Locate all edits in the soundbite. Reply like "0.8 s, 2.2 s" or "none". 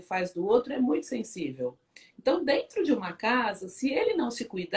none